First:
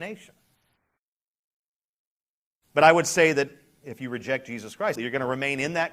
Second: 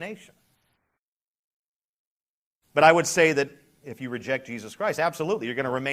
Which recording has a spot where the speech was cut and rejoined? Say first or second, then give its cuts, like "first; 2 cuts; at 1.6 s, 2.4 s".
first; 1 cut; at 5.0 s